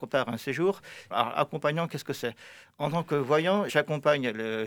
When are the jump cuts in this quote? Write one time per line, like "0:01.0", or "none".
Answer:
0:01.1
0:03.7